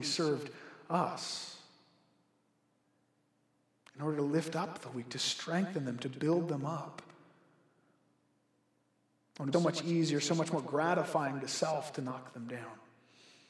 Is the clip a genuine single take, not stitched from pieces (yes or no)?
no